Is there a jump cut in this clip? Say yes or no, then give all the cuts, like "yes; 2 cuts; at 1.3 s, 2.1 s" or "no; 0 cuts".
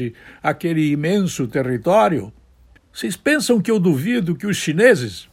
yes; 1 cut; at 2.8 s